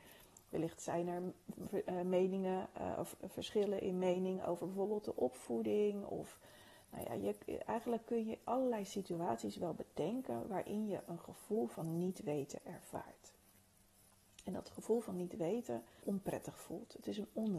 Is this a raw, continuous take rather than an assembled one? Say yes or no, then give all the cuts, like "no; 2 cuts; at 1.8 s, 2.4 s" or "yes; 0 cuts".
no; 1 cut; at 16.0 s